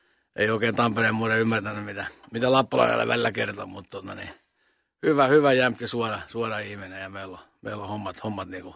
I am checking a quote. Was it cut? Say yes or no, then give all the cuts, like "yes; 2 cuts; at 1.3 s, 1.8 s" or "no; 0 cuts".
no; 0 cuts